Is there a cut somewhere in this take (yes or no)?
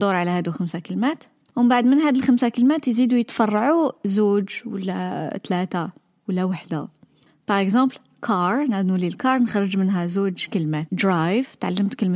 yes